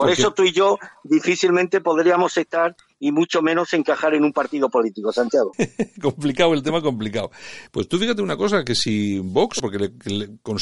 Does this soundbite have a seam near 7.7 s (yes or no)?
yes